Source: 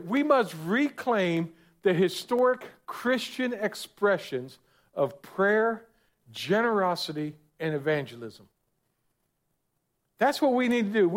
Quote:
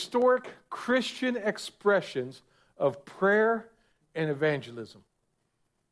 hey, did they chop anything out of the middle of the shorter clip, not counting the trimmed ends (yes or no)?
yes